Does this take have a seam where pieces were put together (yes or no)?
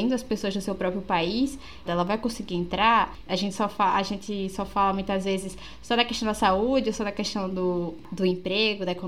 yes